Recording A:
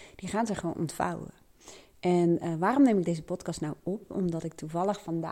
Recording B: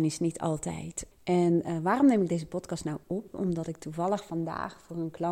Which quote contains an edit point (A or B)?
B